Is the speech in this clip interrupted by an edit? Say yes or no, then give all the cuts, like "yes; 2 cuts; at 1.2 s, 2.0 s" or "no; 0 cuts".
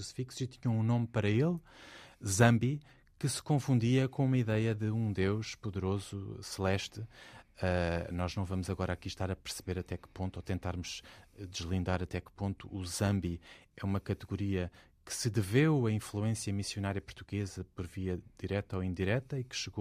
no; 0 cuts